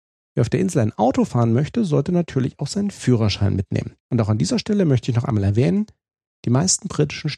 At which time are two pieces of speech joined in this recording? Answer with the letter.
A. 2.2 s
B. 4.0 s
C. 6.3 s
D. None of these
B